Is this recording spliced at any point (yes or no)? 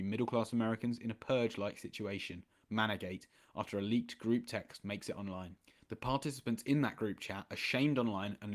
no